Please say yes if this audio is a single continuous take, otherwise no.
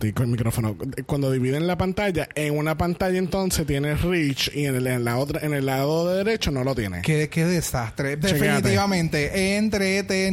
yes